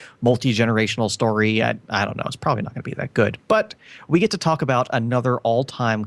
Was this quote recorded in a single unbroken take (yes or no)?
yes